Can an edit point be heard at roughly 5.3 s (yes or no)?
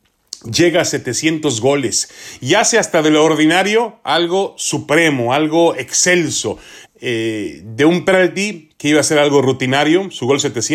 no